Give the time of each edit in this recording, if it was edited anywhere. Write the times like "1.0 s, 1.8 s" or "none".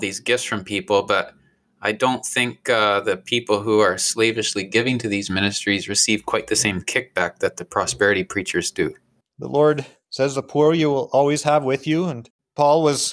9.2 s